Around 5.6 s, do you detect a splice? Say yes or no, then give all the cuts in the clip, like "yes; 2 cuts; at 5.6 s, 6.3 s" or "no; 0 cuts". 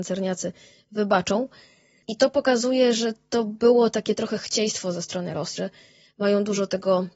yes; 1 cut; at 5.6 s